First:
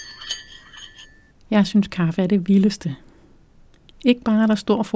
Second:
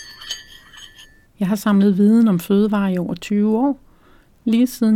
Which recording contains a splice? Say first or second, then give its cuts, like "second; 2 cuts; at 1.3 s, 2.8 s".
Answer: second; 1 cut; at 1.2 s